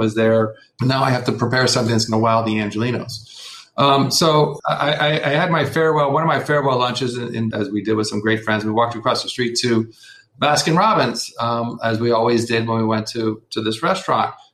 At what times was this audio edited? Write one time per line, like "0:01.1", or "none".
0:07.5

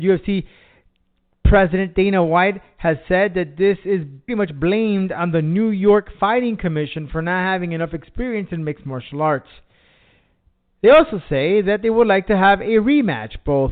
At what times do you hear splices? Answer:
0:04.3

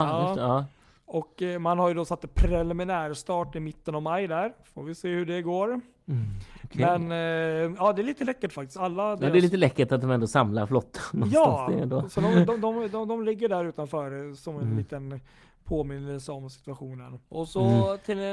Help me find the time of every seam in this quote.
none

